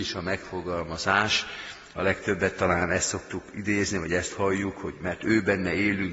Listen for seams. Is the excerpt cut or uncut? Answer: uncut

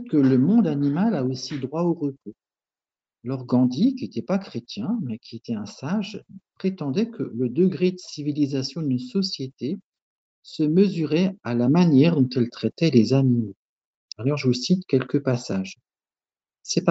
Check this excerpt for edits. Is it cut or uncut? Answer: cut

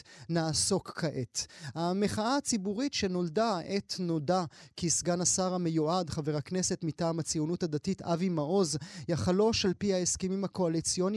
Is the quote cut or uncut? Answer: uncut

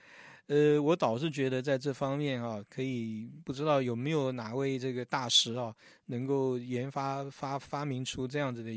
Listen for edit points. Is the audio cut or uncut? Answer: uncut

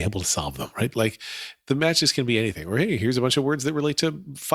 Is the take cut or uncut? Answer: cut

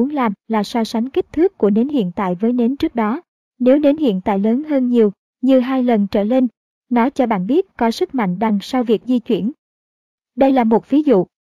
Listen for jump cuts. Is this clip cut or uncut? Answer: uncut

